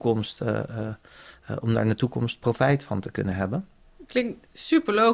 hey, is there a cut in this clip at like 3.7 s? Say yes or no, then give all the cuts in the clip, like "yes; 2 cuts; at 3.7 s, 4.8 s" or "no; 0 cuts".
no; 0 cuts